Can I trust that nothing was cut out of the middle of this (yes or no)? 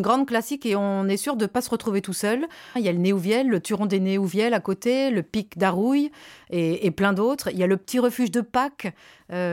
no